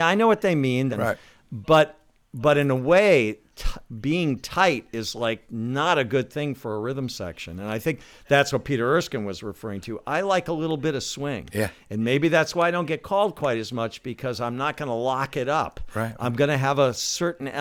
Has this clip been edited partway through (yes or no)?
yes